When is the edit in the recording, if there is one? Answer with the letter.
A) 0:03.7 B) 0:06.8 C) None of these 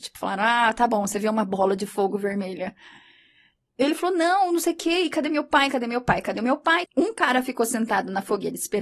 B